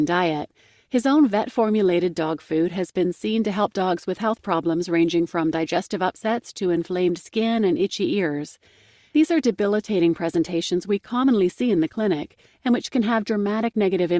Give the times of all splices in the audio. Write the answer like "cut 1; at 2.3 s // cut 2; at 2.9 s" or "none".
none